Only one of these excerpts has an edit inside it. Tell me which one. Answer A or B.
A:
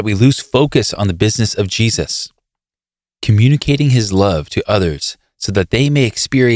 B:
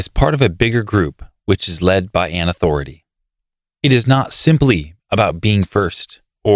B